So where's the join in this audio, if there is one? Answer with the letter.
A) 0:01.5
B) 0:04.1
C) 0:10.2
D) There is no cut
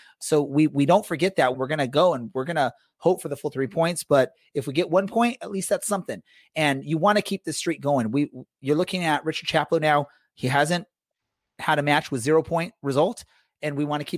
A